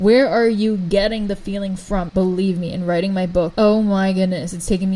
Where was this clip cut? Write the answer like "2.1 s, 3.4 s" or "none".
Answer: 2.1 s, 3.5 s